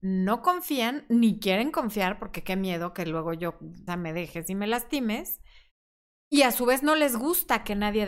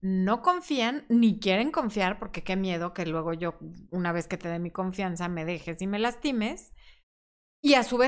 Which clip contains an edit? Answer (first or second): first